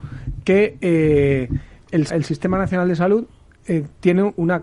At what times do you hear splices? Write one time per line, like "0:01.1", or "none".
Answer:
0:02.1

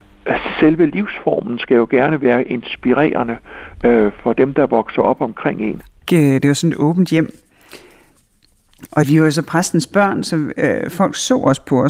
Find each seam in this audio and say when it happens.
0:06.1

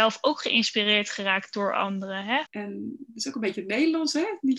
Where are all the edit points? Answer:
0:02.4

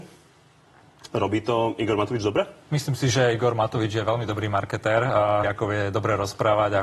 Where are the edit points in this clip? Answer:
0:02.6
0:05.4

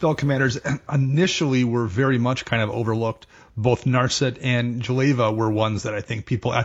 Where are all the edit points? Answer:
none

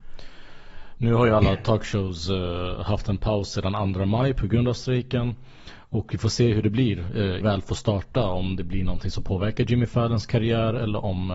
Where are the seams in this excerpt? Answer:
0:07.4

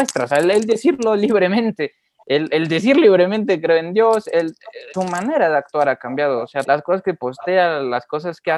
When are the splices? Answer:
0:04.9
0:06.7

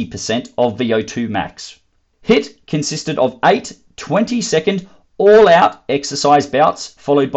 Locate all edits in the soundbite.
0:02.1

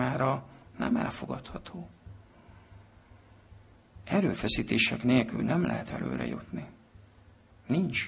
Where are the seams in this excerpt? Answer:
none

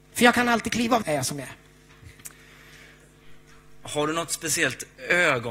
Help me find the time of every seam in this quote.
0:01.0

